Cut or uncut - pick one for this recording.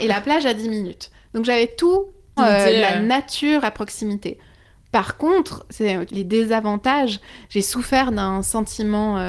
cut